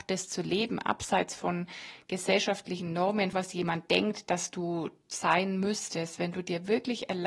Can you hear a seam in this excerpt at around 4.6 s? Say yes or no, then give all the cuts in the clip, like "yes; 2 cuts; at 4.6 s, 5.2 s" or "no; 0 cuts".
no; 1 cut; at 3.3 s